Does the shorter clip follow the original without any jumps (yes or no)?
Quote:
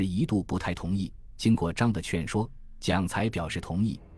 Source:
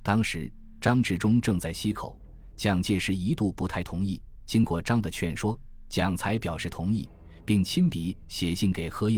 yes